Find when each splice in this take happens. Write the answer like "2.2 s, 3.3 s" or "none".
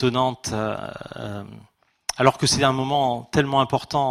none